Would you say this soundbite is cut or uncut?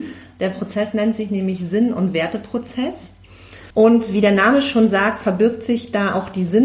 cut